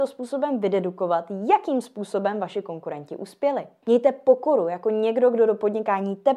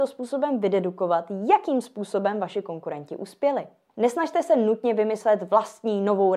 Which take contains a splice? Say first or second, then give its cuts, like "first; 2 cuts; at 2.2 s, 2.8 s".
first; 1 cut; at 3.8 s